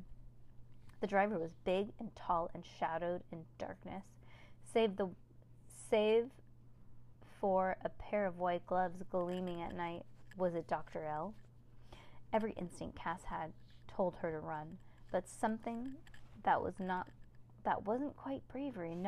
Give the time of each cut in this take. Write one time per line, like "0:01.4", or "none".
none

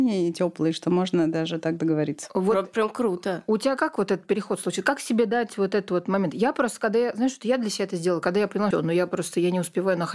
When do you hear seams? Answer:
0:08.7

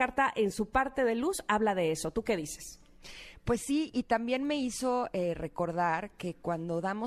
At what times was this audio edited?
none

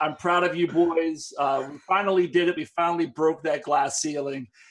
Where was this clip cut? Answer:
none

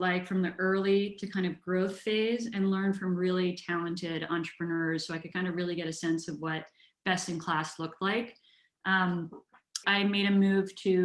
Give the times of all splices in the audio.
0:09.8

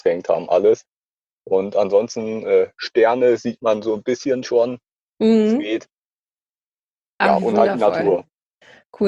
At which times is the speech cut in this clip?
none

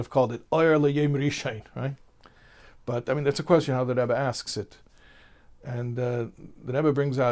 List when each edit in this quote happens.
none

